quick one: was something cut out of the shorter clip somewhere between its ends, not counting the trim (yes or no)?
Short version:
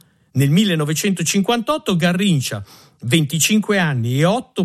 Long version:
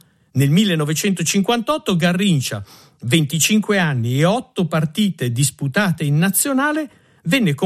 no